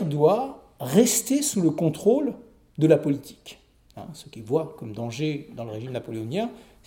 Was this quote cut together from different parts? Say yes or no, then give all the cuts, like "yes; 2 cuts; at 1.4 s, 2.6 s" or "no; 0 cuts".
no; 0 cuts